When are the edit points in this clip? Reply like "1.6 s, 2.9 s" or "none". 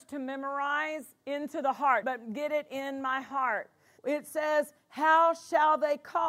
2.0 s, 4.0 s